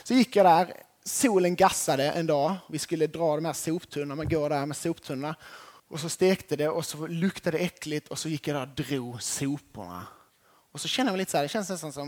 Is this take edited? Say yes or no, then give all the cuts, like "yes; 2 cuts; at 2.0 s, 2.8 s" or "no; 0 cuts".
yes; 1 cut; at 5.8 s